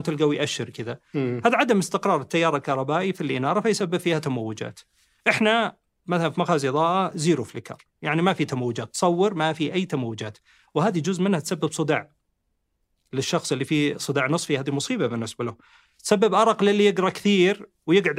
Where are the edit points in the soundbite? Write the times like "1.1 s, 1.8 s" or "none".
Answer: none